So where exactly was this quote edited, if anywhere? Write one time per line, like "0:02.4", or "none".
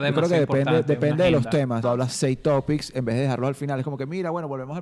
0:01.8